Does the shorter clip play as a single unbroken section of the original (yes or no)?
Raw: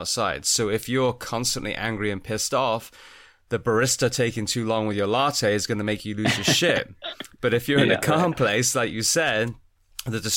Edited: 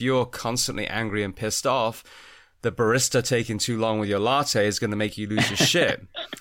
yes